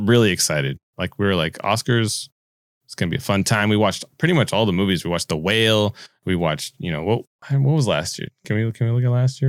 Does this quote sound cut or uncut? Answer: uncut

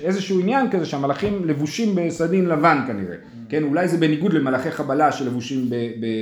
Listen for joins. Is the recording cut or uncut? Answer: uncut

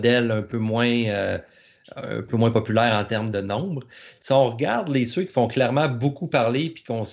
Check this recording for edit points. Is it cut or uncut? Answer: uncut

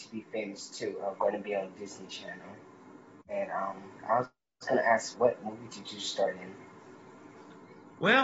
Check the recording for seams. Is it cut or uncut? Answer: cut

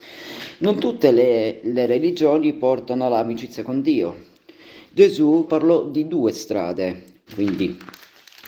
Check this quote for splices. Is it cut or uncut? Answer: cut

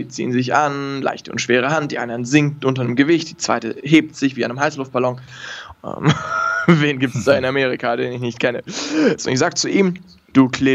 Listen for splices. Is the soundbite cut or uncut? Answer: cut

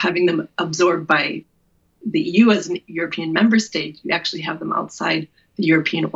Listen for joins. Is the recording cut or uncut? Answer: uncut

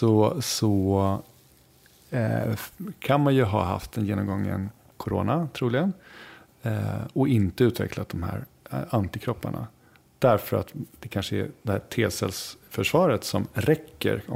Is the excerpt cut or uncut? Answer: uncut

